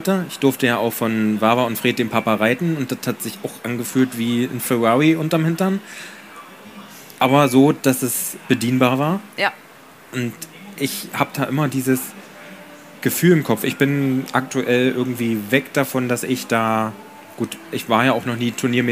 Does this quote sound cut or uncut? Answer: uncut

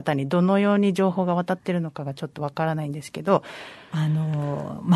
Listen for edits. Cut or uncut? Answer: cut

